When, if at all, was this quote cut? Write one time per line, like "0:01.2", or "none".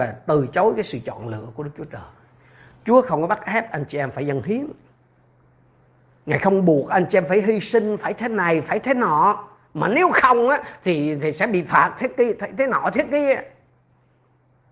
none